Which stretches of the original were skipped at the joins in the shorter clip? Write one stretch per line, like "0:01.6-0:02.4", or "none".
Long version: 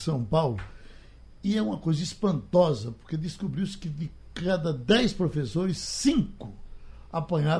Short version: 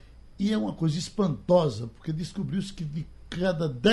none